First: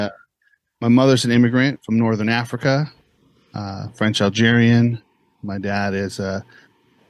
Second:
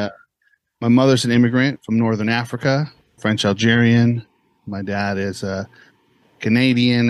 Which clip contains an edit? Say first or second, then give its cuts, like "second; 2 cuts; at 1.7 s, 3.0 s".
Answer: second; 1 cut; at 3.2 s